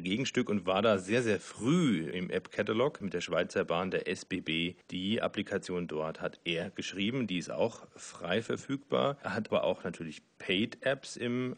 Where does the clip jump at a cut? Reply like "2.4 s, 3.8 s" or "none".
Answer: none